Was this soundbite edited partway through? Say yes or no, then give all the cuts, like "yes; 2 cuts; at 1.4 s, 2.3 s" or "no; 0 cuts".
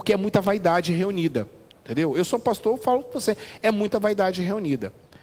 no; 0 cuts